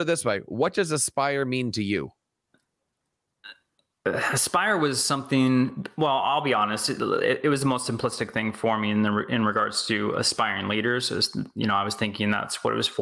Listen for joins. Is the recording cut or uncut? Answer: uncut